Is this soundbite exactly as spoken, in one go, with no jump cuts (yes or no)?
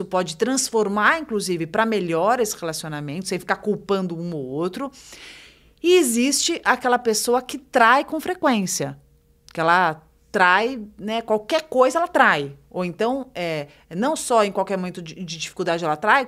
yes